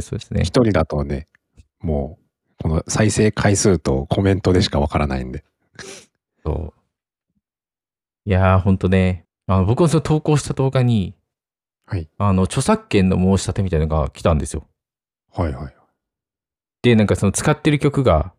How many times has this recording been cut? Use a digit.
1